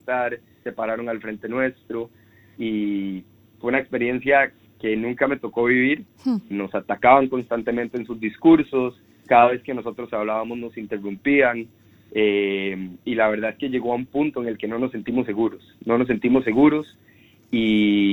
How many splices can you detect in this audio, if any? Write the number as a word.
two